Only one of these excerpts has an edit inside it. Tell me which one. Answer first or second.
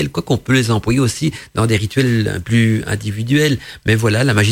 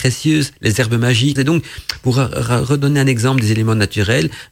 second